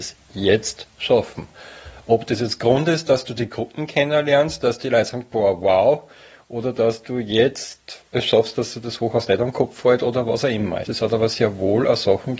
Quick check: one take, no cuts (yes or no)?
no